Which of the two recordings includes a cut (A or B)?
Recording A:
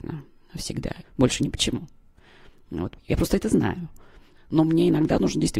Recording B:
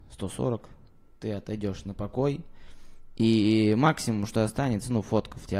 A